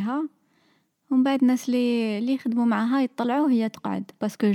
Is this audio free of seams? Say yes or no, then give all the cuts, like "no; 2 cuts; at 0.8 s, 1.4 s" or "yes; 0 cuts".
yes; 0 cuts